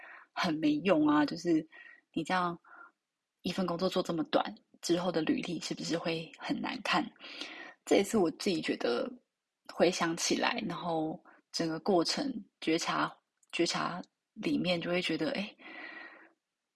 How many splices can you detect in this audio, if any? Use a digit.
1